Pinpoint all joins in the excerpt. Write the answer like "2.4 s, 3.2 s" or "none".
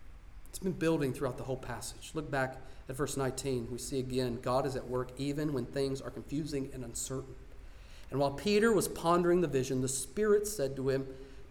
none